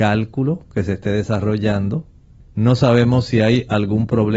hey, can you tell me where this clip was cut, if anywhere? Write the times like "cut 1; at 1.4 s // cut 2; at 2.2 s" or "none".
cut 1; at 2.4 s